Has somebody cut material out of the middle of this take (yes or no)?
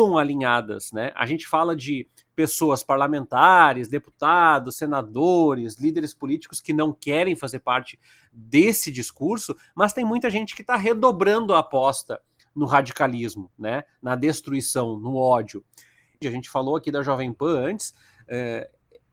yes